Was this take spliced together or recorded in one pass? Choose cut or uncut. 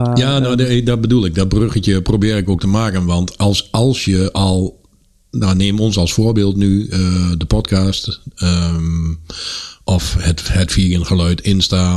uncut